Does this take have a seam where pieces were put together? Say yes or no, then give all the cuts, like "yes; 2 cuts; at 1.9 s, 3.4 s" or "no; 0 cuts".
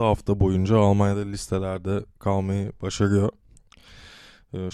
no; 0 cuts